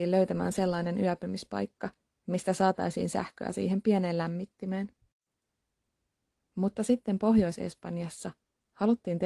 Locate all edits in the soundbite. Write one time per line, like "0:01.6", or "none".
none